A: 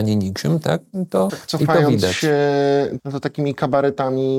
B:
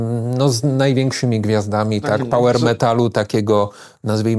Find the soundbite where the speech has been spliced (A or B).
A